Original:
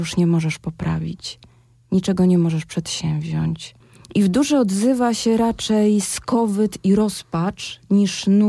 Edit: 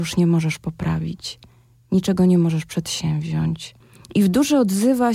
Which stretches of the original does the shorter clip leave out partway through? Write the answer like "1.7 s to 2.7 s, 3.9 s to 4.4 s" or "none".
none